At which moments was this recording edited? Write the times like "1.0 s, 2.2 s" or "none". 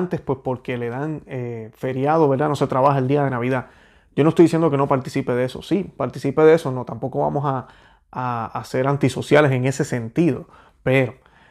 none